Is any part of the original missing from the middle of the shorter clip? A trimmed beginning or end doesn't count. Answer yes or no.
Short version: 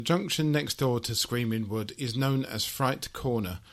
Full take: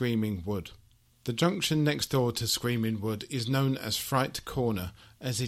no